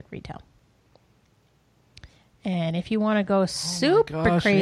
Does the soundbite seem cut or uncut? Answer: uncut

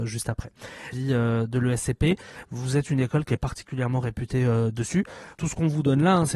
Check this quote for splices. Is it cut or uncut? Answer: cut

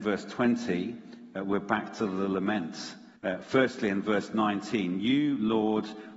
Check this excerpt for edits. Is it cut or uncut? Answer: cut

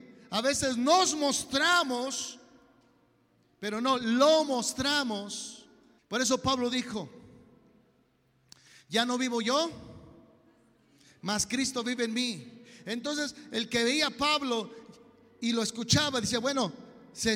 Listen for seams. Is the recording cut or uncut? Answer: cut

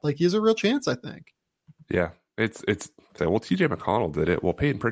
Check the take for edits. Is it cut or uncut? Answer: cut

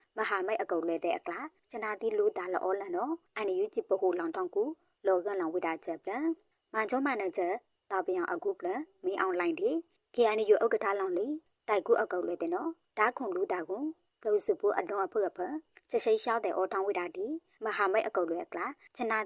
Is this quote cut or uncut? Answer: uncut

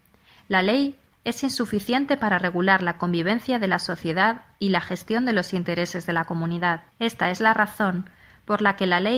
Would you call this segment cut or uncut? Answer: cut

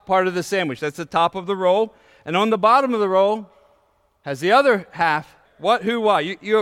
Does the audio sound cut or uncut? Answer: cut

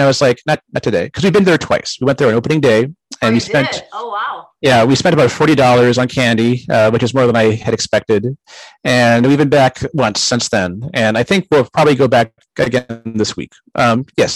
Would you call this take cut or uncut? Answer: uncut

